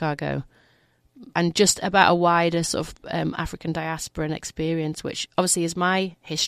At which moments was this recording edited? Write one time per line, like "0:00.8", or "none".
0:01.3